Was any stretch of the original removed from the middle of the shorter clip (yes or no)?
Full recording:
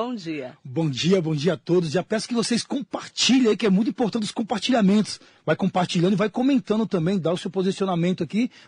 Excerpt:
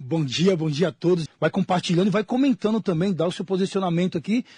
yes